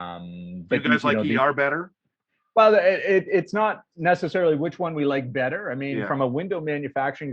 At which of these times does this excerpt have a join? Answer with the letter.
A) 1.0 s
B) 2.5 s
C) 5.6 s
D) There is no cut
D